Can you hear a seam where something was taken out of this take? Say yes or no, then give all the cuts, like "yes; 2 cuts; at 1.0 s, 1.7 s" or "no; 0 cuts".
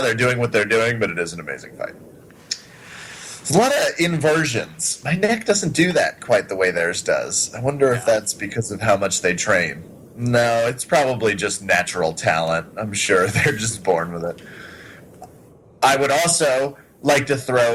no; 0 cuts